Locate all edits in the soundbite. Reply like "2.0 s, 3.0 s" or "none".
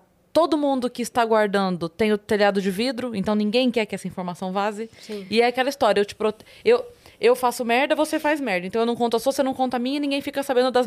none